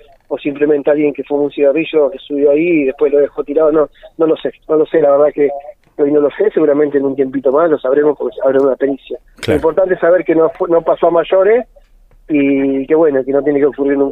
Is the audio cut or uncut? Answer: uncut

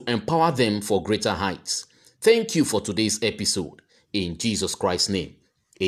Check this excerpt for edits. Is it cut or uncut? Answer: uncut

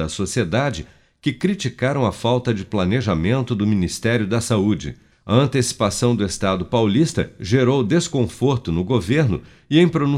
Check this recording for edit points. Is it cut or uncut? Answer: cut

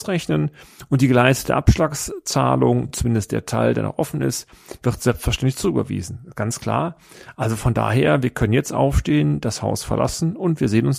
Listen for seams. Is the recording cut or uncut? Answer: uncut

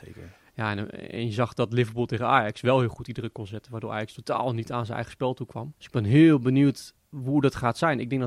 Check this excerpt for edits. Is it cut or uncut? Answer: cut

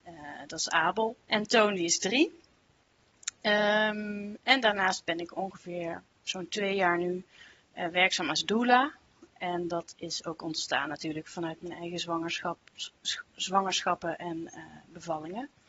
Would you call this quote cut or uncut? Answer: cut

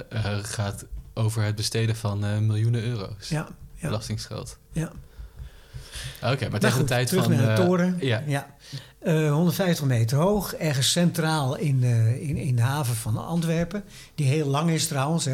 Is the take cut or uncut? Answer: uncut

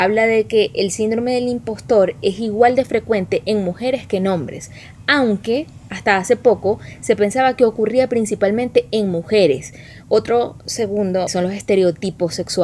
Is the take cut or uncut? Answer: cut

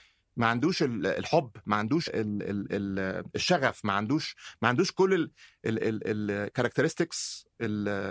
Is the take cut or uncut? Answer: cut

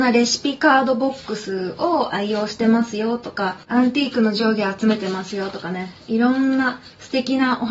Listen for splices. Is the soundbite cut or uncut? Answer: cut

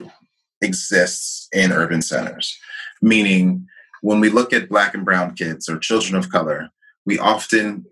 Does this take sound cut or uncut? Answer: uncut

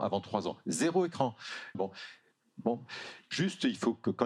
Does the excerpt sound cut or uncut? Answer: cut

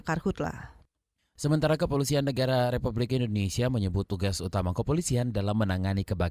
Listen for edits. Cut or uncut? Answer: uncut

